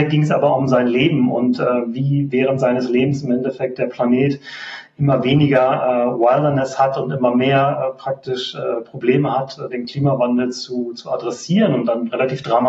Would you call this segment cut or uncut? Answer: uncut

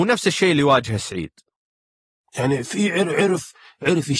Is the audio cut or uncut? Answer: uncut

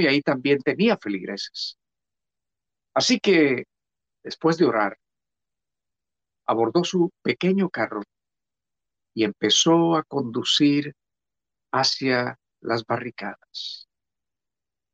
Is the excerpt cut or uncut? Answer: uncut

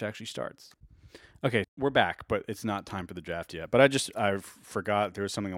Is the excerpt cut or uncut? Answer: cut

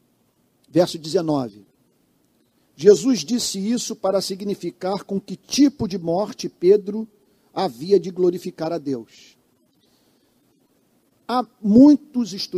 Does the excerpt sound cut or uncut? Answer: uncut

